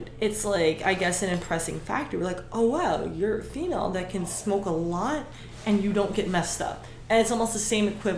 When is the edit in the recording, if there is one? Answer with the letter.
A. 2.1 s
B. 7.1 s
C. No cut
C